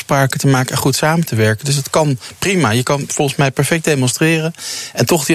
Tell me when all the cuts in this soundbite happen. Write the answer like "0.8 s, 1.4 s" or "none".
none